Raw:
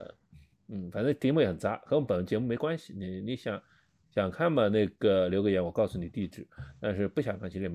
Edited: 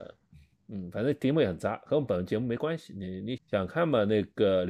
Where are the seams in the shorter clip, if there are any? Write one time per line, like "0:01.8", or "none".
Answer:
0:03.4